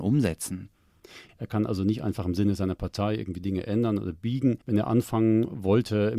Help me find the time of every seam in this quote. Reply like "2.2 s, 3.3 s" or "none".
1.3 s, 4.6 s